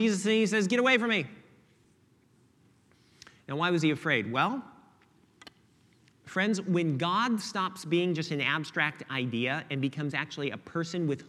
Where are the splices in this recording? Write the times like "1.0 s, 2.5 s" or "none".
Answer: none